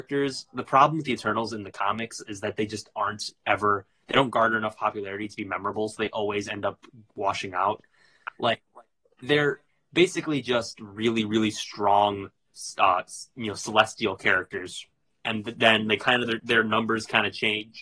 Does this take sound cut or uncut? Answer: uncut